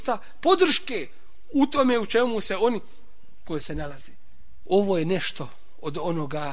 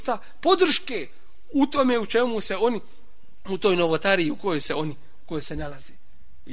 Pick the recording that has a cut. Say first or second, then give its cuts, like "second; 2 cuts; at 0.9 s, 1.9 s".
first; 2 cuts; at 3.4 s, 4.6 s